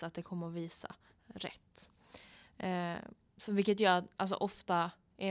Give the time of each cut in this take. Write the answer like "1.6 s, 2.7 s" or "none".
none

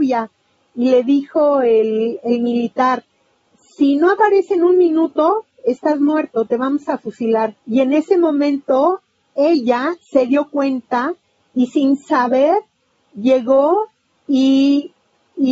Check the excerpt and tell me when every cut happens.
7.6 s

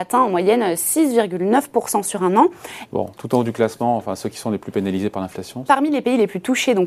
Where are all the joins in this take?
2.9 s, 5.7 s

